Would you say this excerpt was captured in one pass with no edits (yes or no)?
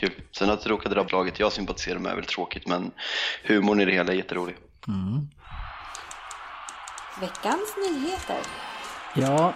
no